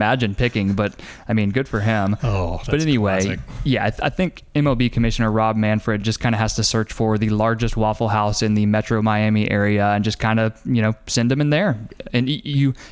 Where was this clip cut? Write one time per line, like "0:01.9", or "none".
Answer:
none

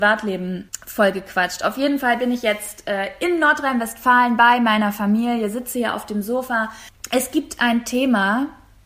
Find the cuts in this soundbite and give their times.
none

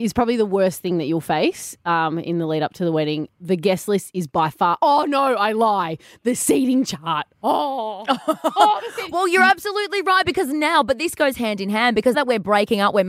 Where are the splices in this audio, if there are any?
0:12.1

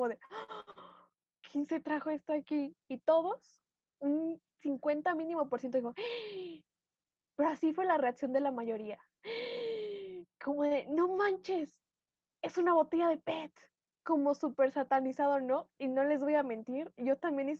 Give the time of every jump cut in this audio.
0:02.8

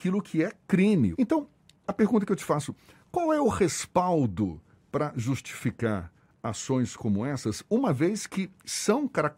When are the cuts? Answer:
0:01.1

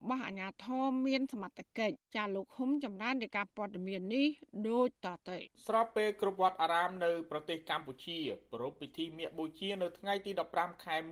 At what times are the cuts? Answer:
0:02.0
0:05.5

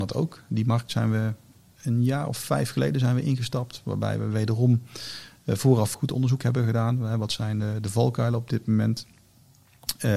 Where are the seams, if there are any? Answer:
0:05.9

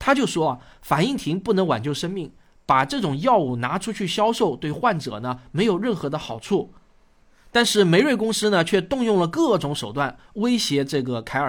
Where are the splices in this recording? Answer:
none

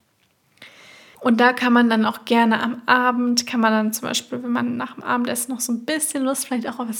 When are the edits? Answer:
0:01.1

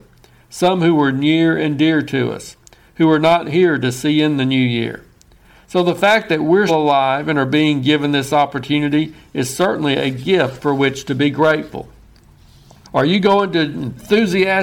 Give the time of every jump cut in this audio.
0:06.7
0:12.8

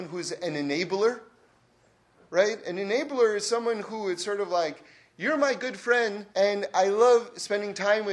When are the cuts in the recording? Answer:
0:06.3

